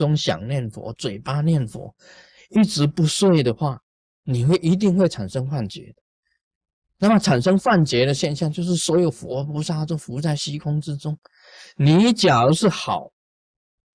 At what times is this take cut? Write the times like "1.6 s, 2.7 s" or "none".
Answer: none